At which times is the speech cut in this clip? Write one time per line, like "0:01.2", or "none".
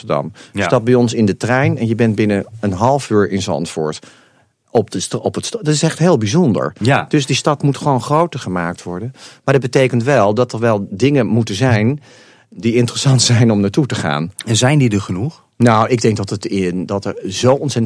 none

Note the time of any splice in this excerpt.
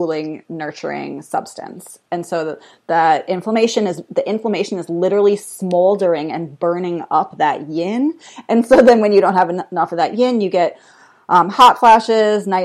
none

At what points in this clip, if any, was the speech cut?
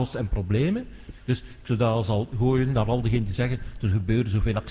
0:01.3
0:02.3

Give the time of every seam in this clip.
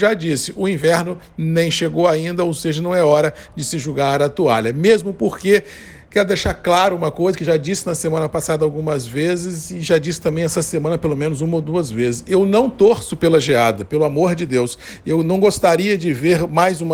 none

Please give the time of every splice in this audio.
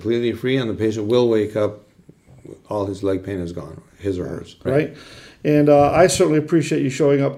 0:04.6

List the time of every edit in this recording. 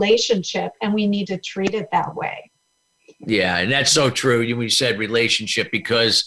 none

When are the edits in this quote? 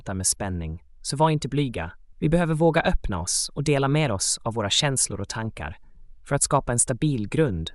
0:02.1

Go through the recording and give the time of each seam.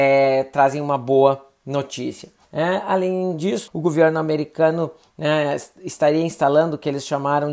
0:02.4
0:03.7

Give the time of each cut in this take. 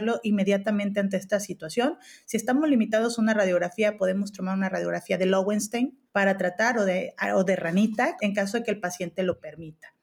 0:06.1
0:08.2

